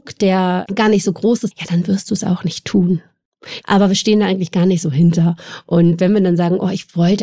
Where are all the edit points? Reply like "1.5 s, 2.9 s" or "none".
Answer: 1.5 s, 3.6 s